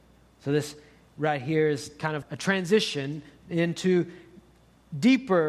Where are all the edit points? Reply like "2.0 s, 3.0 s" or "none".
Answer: 2.2 s